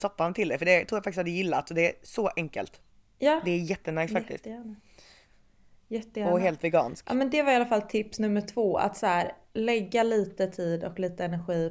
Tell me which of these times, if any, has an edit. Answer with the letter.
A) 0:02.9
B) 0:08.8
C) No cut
C